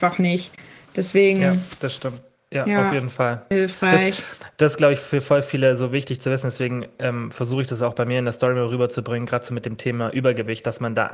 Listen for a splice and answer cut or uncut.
cut